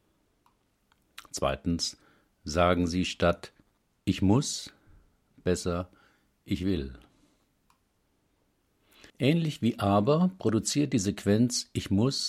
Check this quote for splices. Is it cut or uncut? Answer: cut